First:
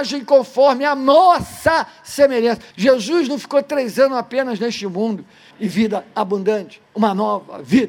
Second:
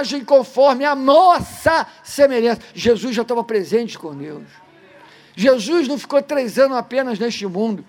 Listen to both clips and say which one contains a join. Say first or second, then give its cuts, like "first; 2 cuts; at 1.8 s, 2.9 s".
first; 2 cuts; at 2.7 s, 5.5 s